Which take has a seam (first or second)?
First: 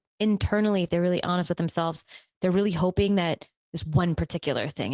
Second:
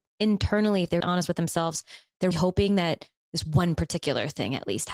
second